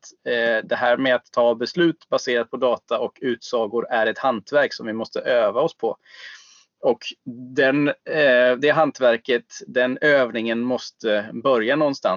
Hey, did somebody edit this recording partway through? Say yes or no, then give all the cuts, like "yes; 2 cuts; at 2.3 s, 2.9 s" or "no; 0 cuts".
no; 0 cuts